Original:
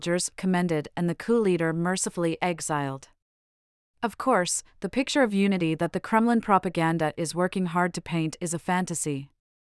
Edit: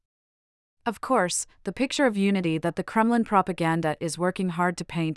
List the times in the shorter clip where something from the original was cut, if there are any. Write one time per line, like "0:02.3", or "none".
none